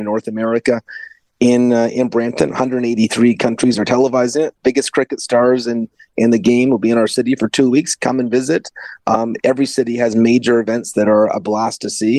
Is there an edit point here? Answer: no; 0 cuts

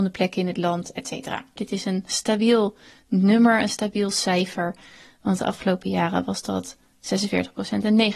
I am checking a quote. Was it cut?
yes; 1 cut; at 1.6 s

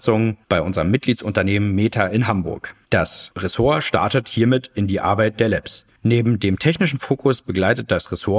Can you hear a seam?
yes; 2 cuts; at 2.8 s, 6.0 s

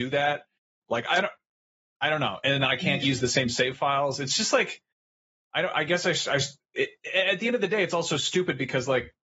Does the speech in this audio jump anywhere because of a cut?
no; 0 cuts

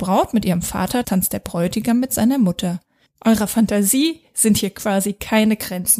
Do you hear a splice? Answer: yes; 2 cuts; at 1.0 s, 3.1 s

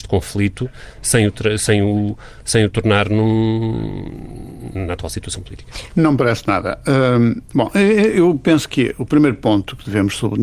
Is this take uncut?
no; 2 cuts; at 4.7 s, 5.9 s

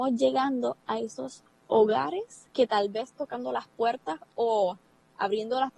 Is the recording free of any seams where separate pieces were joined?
no; 1 cut; at 2.5 s

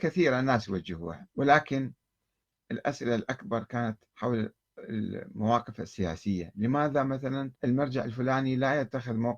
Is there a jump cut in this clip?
yes; 3 cuts; at 1.3 s, 4.1 s, 7.6 s

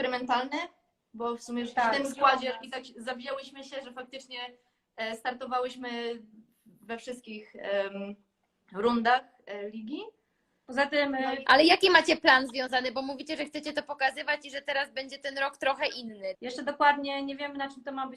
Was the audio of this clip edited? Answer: yes; 2 cuts; at 11.4 s, 16.3 s

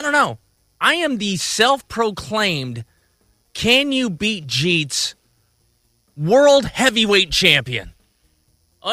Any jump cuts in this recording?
no; 0 cuts

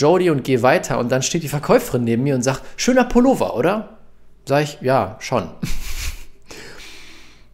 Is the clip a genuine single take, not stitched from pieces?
yes; 0 cuts

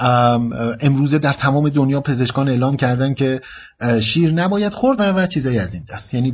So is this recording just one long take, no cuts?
no; 1 cut; at 5.0 s

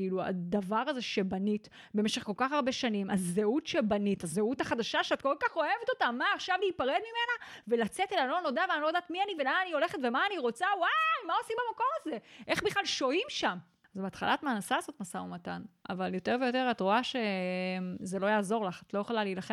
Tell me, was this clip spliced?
no; 0 cuts

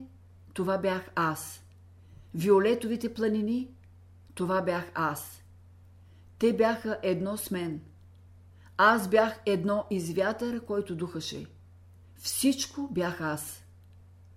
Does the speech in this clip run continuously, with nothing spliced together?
no; 1 cut; at 12.0 s

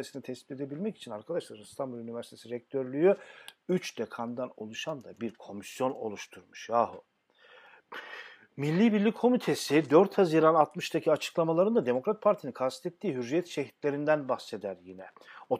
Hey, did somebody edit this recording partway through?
no; 0 cuts

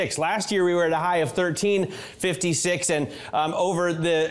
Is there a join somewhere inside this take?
no; 0 cuts

